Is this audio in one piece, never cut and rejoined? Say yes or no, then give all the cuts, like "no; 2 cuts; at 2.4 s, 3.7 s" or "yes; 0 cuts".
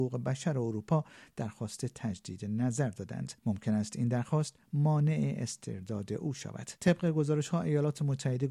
no; 2 cuts; at 3.4 s, 6.8 s